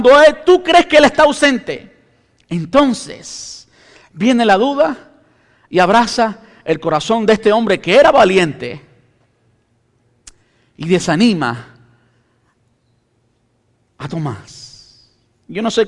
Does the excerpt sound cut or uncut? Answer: uncut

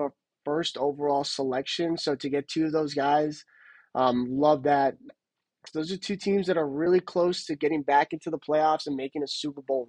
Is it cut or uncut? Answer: cut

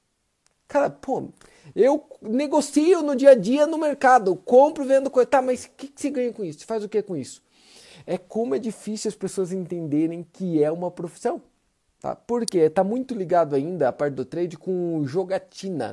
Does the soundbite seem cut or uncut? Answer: uncut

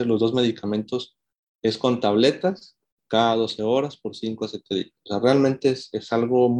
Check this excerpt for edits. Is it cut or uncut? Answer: uncut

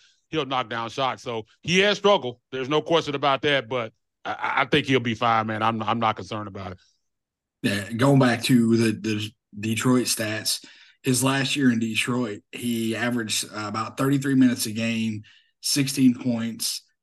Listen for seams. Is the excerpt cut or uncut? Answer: uncut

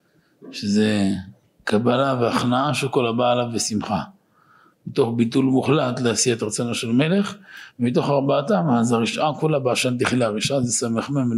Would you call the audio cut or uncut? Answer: uncut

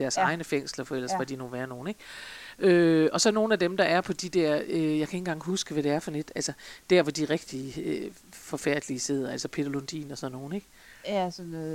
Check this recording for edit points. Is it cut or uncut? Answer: uncut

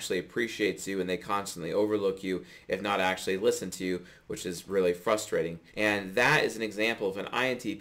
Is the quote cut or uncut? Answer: cut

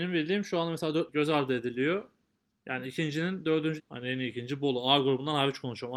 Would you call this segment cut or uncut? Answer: cut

